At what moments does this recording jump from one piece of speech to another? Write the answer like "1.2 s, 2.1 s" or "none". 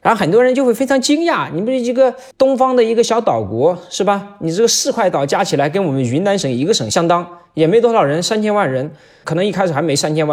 2.3 s